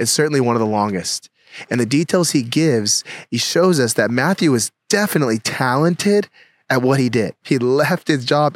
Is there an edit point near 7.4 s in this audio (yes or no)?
yes